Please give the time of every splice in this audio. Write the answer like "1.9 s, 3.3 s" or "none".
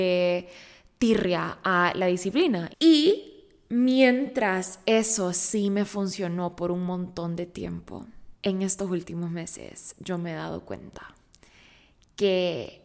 2.7 s, 8.4 s